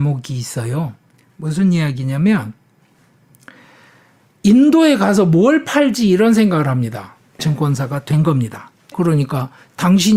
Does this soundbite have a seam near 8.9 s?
yes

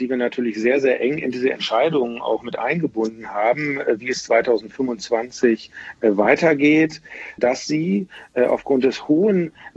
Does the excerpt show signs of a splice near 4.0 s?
no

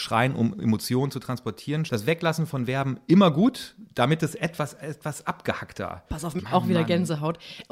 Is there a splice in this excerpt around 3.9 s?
no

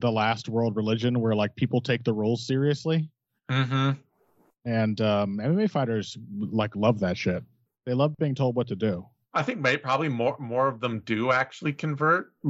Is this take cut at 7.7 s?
yes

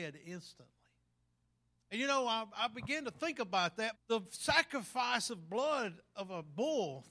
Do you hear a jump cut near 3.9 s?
yes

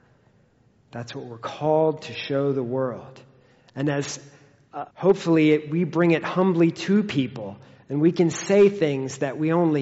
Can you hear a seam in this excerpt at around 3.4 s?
no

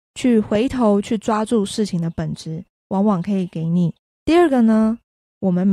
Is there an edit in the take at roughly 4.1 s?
yes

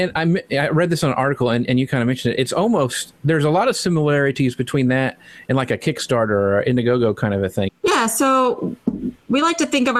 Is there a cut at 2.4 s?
no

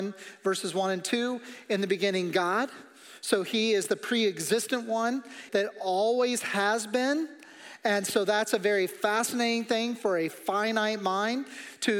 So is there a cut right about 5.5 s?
yes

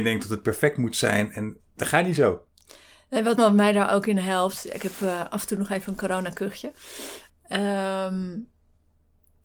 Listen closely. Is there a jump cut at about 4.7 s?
no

